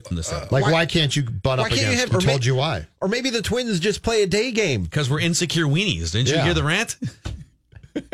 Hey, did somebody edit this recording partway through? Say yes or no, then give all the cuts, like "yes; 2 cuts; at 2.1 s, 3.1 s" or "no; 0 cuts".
yes; 1 cut; at 2.1 s